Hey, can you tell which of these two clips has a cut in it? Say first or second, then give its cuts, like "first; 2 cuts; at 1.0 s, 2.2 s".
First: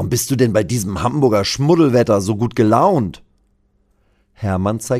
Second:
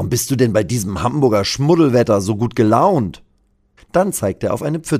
second; 1 cut; at 3.8 s